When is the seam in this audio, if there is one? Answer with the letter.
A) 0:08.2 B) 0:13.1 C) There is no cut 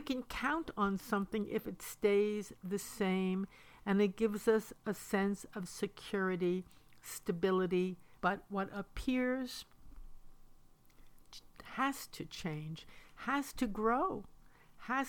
A